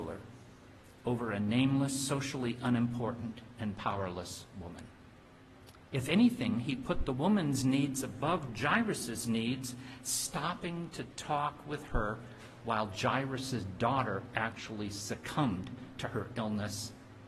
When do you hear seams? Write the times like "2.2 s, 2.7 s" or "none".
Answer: none

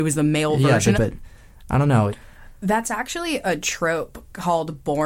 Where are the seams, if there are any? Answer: 0.9 s, 2.1 s

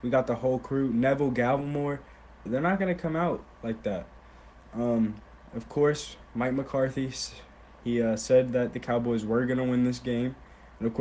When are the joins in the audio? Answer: 2.5 s

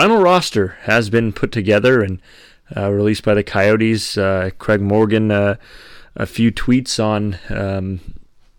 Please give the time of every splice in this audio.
none

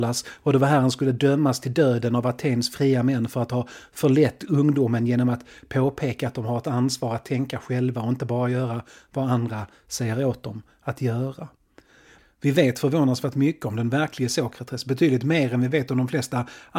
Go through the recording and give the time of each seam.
none

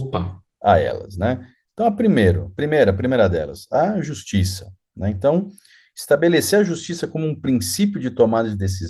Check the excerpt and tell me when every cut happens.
none

